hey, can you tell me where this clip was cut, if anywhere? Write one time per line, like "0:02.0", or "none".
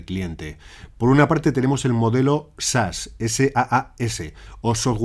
none